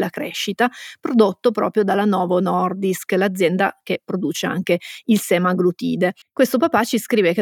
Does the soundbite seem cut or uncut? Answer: cut